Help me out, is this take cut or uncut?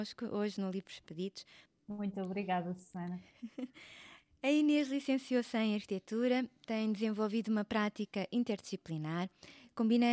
cut